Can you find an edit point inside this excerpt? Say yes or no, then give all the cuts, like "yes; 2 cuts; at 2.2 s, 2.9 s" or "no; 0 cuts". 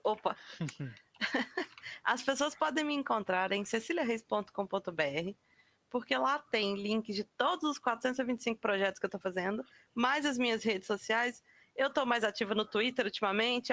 no; 0 cuts